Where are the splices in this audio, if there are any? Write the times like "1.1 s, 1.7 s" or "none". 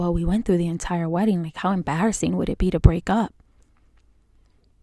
none

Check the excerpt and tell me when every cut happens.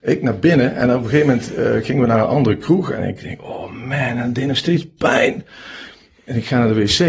none

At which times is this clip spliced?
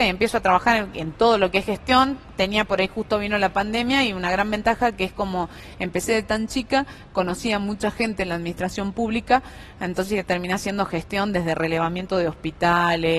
none

